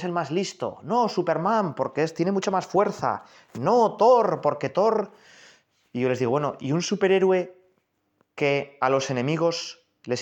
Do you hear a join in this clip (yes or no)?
no